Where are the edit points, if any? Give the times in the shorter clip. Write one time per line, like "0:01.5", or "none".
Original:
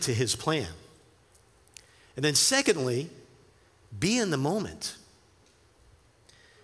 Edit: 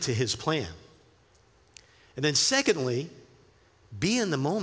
none